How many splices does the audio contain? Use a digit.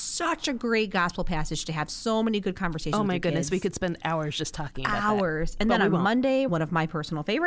1